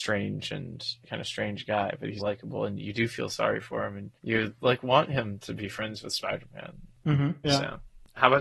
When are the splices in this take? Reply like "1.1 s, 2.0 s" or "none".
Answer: 2.2 s, 4.2 s, 7.4 s